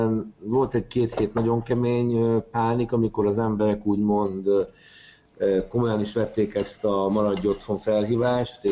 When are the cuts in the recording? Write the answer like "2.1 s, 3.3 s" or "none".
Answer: none